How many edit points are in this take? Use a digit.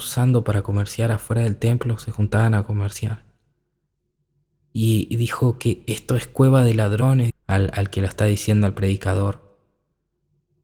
1